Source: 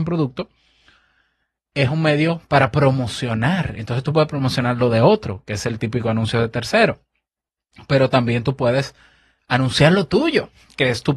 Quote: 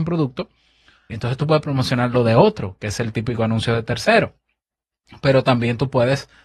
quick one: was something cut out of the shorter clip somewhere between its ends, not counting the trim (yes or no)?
yes